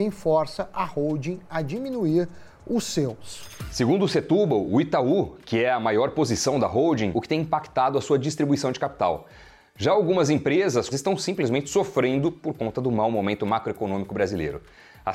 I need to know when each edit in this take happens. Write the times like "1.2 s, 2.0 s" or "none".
7.1 s, 10.9 s